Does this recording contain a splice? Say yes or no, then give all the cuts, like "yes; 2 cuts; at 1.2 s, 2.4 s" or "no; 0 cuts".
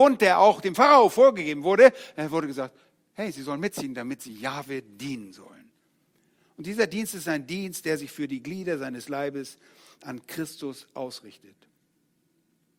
no; 0 cuts